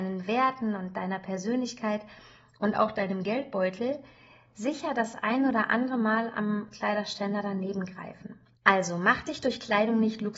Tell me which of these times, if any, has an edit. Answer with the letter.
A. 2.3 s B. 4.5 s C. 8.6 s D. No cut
C